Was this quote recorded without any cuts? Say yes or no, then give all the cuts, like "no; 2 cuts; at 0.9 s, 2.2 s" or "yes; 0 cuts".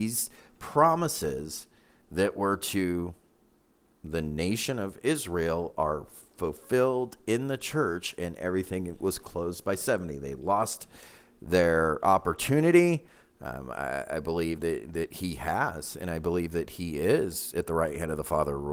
no; 2 cuts; at 13.2 s, 14.6 s